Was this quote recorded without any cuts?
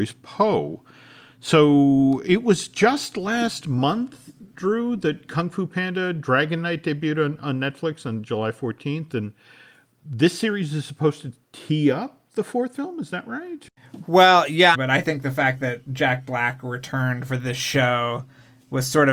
no; 1 cut; at 14.7 s

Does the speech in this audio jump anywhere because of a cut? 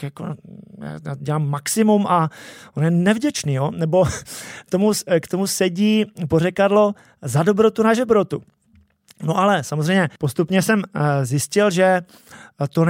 yes; 1 cut; at 10.2 s

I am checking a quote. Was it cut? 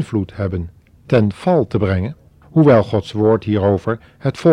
yes; 1 cut; at 2.4 s

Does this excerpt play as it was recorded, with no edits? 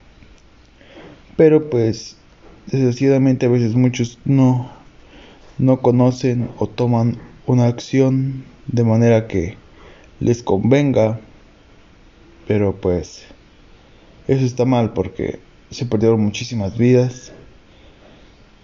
yes; 0 cuts

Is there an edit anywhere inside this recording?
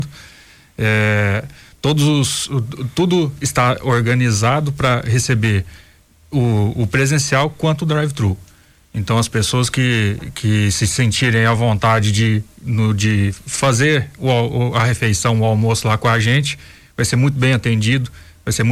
no; 0 cuts

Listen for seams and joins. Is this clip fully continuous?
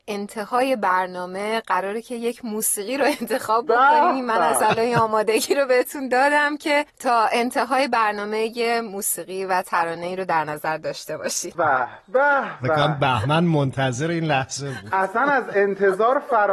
no; 2 cuts; at 6.9 s, 11.5 s

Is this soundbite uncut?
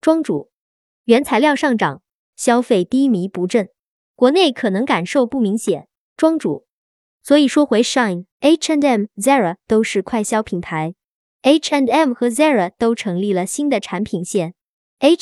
no; 3 cuts; at 2.3 s, 6.1 s, 8.3 s

